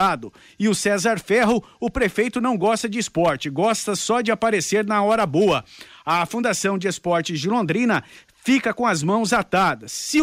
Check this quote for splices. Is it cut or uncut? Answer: uncut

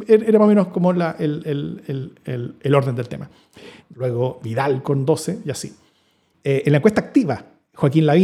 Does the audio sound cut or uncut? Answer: cut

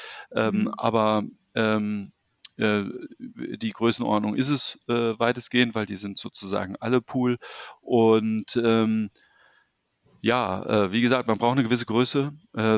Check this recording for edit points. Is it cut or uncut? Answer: uncut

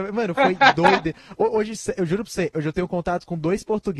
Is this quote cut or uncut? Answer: uncut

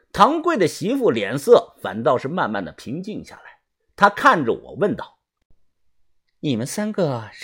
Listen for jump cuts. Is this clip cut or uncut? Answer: uncut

